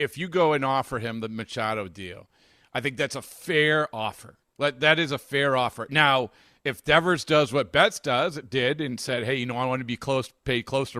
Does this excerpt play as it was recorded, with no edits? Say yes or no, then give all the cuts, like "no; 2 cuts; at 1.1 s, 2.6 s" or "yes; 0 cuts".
yes; 0 cuts